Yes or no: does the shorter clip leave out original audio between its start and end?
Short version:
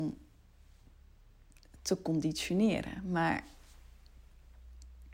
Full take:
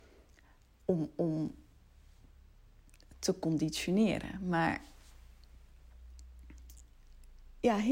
no